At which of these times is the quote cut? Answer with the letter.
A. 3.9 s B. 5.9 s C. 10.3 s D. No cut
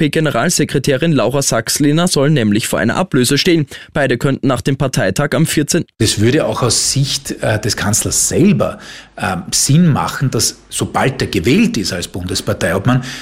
B